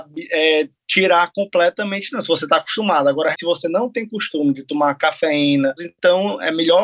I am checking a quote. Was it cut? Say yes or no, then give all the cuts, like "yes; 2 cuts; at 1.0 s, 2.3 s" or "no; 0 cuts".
yes; 2 cuts; at 3.3 s, 5.8 s